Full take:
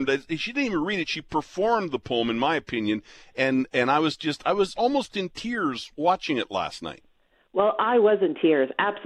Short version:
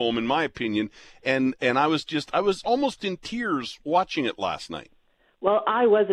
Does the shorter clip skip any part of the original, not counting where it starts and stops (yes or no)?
no